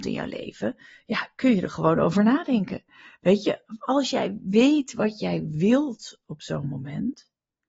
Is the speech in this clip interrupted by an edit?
no; 0 cuts

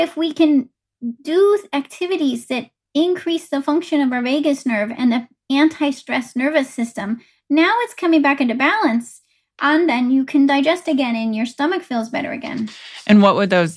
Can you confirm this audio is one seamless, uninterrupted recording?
yes; 0 cuts

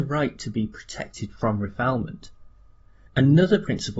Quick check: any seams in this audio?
yes; 1 cut; at 3.1 s

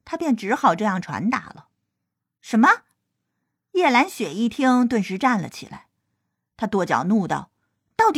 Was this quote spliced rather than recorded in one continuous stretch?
no; 0 cuts

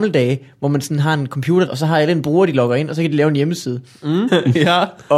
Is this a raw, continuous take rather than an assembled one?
no; 2 cuts; at 1.7 s, 4.3 s

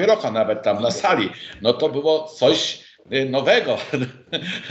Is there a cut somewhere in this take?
no; 0 cuts

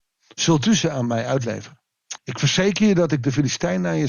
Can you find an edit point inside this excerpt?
yes; 1 cut; at 2.2 s

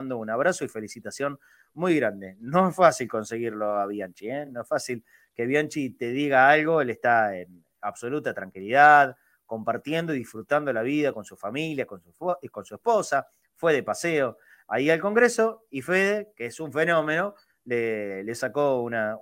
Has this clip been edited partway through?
no; 0 cuts

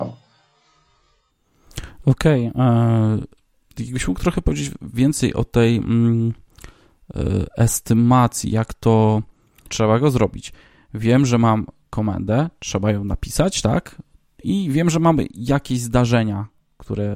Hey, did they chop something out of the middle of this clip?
yes; 1 cut; at 9.7 s

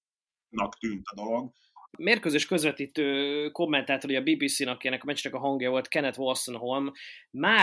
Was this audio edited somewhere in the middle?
yes; 1 cut; at 1.9 s

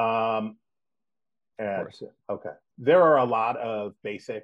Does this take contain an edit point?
yes; 2 cuts; at 1.5 s, 2.7 s

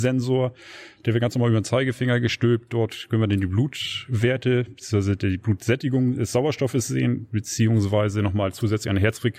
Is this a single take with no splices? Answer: yes; 0 cuts

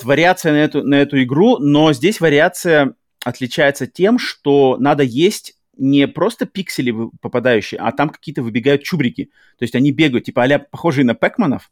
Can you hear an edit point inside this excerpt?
no; 0 cuts

